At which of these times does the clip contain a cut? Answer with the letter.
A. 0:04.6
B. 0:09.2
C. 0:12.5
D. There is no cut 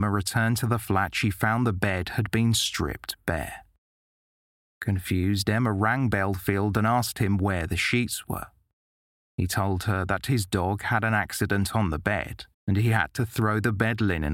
C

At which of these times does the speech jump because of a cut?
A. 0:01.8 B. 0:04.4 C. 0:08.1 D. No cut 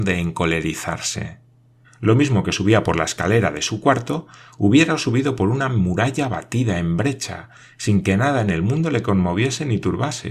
A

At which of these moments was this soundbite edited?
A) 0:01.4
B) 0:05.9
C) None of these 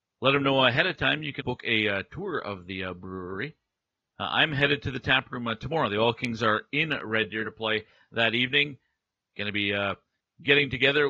A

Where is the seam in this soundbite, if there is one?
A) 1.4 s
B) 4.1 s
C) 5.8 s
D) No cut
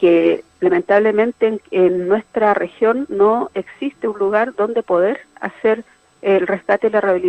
D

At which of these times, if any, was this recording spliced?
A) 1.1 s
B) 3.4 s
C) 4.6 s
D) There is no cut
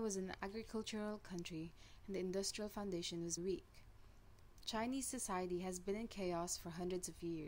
B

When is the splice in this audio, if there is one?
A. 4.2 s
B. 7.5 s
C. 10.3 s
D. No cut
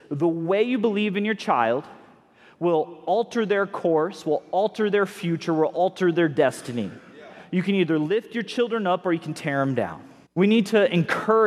C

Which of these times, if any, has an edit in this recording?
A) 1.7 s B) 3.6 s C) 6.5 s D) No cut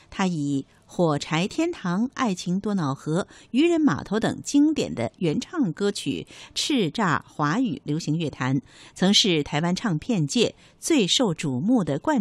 D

